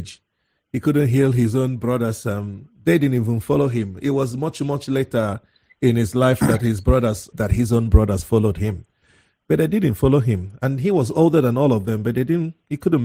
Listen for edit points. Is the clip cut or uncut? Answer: cut